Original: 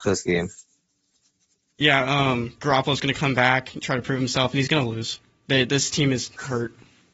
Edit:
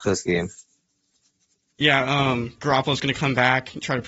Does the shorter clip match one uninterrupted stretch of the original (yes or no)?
yes